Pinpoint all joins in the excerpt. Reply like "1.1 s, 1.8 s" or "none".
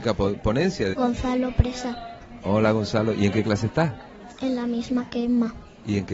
0.9 s